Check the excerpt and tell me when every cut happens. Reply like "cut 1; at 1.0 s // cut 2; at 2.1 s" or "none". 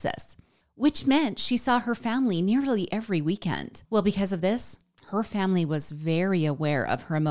cut 1; at 3.8 s